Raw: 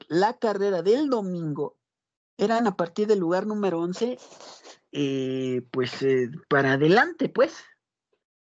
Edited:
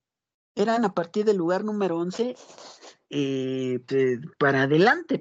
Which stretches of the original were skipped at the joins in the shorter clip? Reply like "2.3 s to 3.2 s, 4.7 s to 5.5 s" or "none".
5.7 s to 6.0 s